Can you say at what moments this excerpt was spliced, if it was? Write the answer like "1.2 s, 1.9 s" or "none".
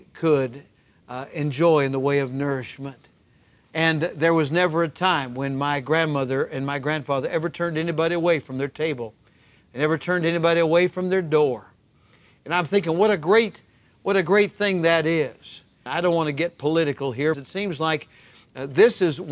15.9 s, 17.3 s